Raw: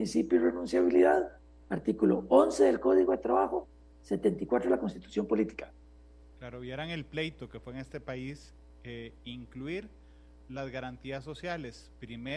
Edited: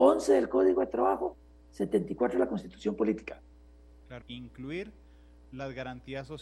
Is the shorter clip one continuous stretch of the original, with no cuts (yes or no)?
no